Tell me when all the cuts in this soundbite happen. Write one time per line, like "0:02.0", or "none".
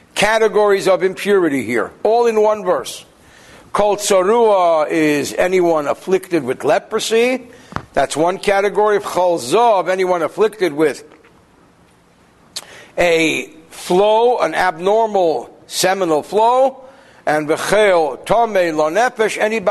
none